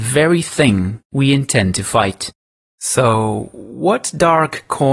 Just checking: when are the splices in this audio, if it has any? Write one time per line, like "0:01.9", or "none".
0:02.6